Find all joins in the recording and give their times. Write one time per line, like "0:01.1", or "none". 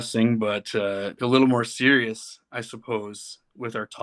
0:01.2